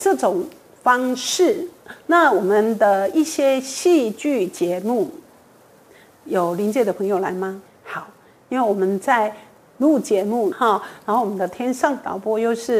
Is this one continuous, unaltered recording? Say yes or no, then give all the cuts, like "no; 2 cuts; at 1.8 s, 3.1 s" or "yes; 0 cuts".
no; 2 cuts; at 7.7 s, 10.5 s